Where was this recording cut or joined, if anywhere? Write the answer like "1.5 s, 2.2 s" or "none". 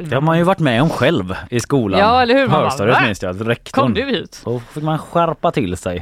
none